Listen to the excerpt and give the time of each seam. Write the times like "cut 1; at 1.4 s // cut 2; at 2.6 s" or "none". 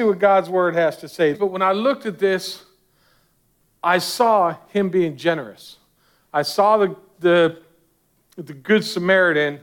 cut 1; at 1.3 s